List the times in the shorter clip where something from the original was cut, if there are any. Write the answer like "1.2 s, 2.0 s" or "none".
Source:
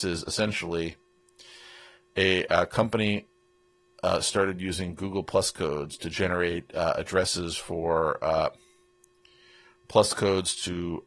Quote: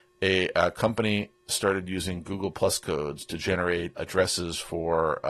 1.5 s, 4.0 s